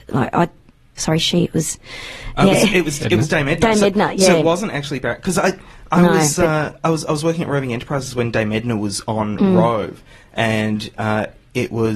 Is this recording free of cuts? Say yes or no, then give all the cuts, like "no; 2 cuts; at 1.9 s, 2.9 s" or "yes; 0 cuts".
no; 1 cut; at 1.0 s